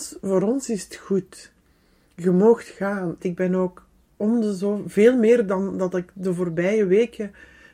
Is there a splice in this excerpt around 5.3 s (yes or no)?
no